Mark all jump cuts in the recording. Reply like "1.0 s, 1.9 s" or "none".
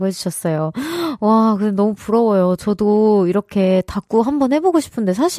none